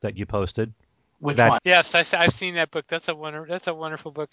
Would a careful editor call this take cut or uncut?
cut